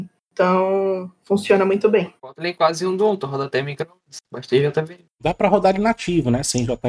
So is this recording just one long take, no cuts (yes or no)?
no